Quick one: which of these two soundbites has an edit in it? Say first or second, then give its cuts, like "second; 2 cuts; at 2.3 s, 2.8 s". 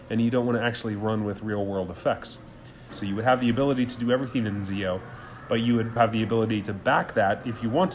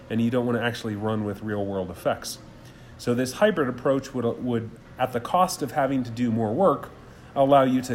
first; 2 cuts; at 2.9 s, 6.0 s